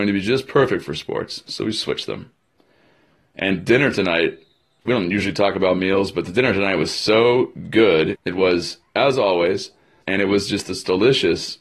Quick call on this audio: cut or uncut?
cut